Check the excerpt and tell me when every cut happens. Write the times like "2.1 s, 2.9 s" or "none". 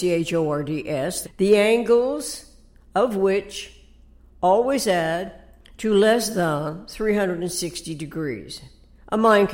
1.2 s